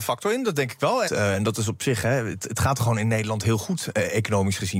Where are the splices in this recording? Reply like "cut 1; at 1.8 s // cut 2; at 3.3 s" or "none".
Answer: cut 1; at 1.0 s

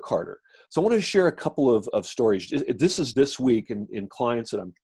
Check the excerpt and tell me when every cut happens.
cut 1; at 1.9 s // cut 2; at 3.1 s

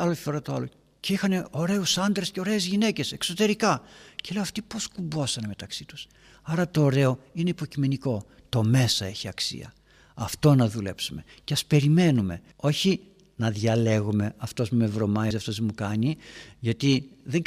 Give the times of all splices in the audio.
cut 1; at 12.5 s // cut 2; at 15.3 s

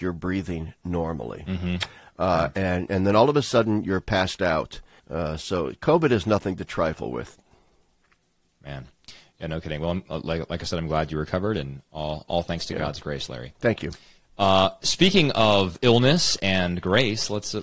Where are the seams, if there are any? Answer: cut 1; at 5.0 s

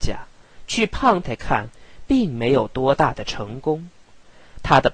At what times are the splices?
cut 1; at 1.2 s

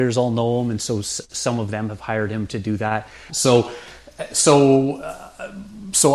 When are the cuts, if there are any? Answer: cut 1; at 3.3 s

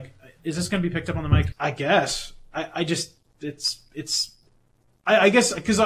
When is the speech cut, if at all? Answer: cut 1; at 1.5 s

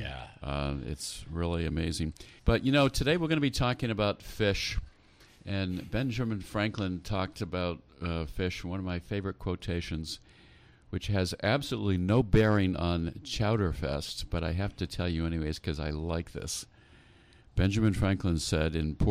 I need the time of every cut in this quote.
cut 1; at 2.4 s

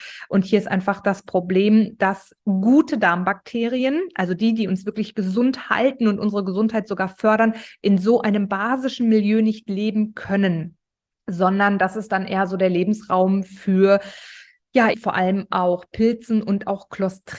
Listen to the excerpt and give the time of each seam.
cut 1; at 14.9 s

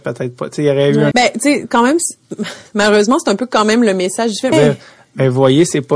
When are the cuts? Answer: cut 1; at 1.1 s // cut 2; at 4.5 s

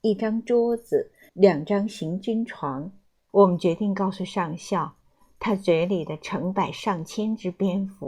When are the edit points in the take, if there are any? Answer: cut 1; at 1.3 s // cut 2; at 3.3 s

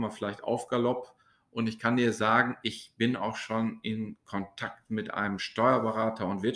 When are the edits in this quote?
none

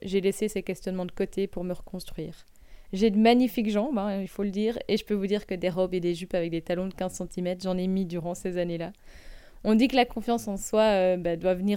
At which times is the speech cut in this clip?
cut 1; at 2.8 s

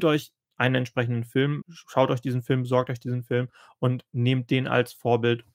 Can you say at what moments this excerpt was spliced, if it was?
cut 1; at 1.6 s

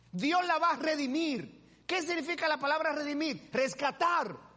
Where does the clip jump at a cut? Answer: none

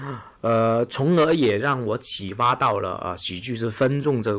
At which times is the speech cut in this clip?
none

